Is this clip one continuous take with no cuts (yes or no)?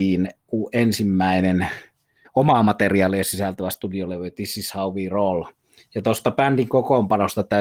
no